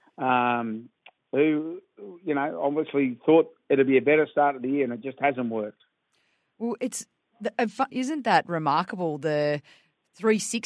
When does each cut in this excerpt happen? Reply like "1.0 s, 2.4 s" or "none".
7.9 s

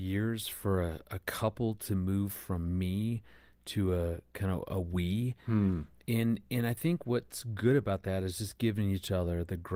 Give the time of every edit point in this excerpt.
none

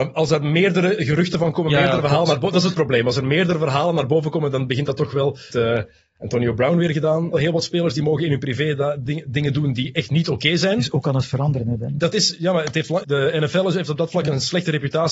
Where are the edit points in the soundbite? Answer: 5.5 s, 7.3 s, 13.0 s

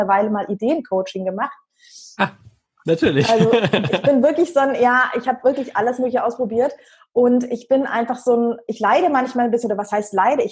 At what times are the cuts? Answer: none

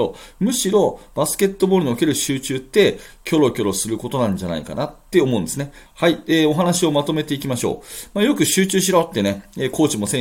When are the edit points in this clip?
5.9 s

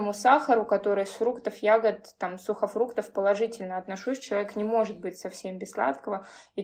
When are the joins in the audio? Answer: none

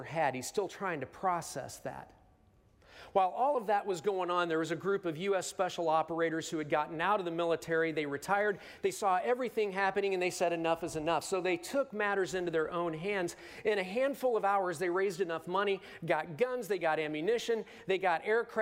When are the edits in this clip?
none

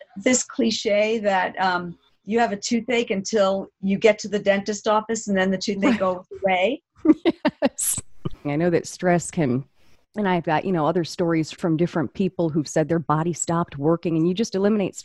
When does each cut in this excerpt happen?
8.4 s, 11.5 s

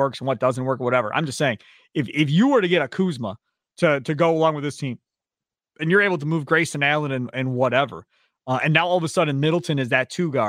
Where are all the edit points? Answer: none

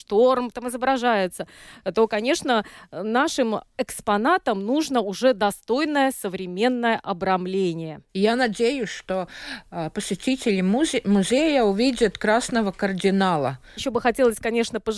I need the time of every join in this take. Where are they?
8.1 s, 13.8 s

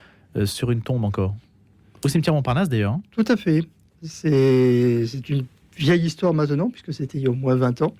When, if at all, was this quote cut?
none

